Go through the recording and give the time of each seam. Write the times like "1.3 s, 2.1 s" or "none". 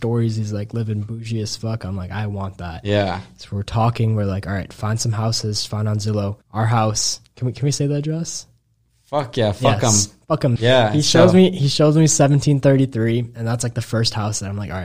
6.4 s, 10.6 s

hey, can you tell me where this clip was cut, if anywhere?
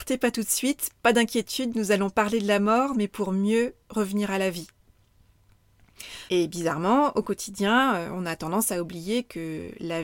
3.8 s, 6.3 s

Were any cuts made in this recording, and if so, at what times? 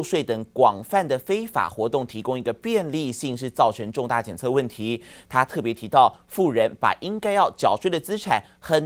none

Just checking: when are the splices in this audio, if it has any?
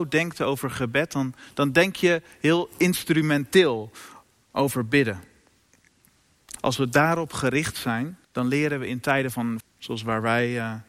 6.6 s, 8.2 s, 9.6 s

